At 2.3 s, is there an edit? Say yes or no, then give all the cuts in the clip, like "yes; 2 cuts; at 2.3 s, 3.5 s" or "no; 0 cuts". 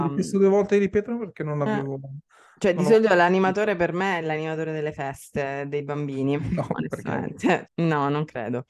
no; 2 cuts; at 6.4 s, 7.6 s